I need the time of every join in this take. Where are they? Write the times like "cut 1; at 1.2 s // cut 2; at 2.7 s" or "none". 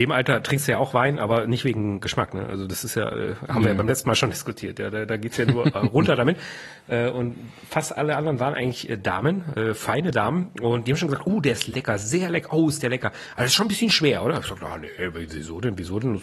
none